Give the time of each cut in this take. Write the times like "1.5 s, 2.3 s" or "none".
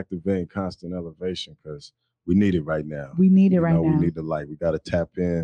none